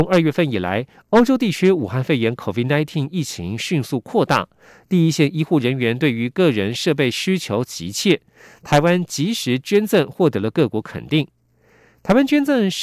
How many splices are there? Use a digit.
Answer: 0